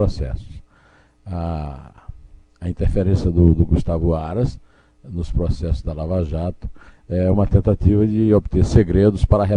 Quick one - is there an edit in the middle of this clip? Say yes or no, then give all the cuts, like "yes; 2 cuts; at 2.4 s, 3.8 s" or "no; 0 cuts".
no; 0 cuts